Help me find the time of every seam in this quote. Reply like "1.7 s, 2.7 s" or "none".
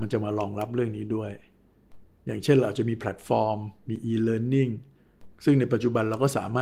none